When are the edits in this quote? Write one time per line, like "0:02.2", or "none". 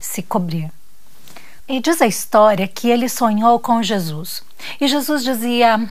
0:01.6